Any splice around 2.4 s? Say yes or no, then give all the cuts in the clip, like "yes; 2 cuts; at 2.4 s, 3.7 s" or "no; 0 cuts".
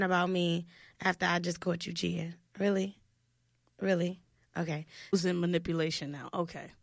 no; 1 cut; at 5.1 s